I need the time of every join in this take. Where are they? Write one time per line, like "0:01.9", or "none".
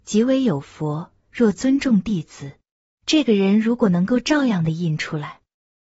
0:02.9